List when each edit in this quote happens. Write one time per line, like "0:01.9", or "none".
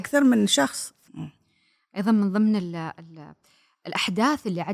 0:01.0